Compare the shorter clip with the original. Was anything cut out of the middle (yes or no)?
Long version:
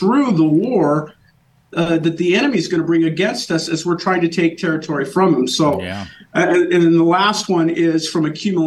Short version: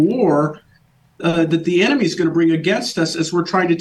no